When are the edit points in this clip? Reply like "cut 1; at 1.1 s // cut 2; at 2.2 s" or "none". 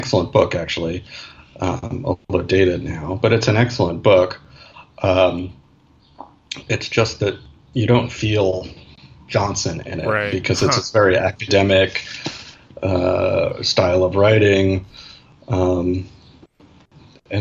none